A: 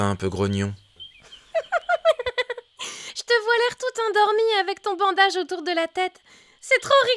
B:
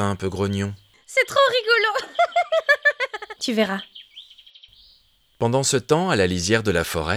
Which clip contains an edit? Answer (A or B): B